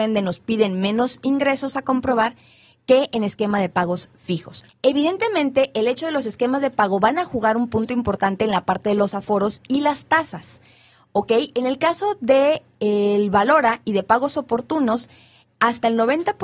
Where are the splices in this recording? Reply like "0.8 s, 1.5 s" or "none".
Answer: 4.7 s